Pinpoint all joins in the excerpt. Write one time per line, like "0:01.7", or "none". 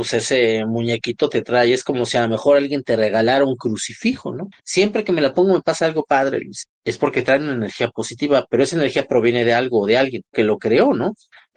0:04.6
0:10.3